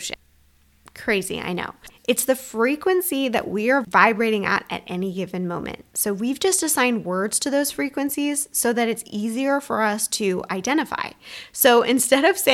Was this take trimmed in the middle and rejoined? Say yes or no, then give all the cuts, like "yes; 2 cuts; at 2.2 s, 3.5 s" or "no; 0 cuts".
no; 0 cuts